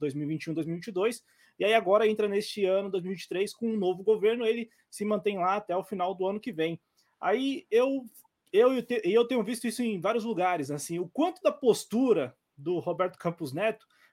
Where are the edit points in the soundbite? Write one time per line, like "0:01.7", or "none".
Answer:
none